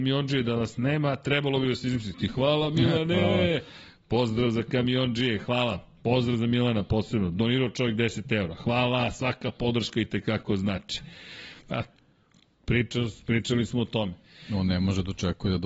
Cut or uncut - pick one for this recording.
cut